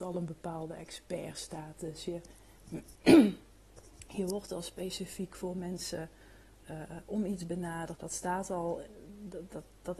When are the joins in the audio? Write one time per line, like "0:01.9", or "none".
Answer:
0:07.9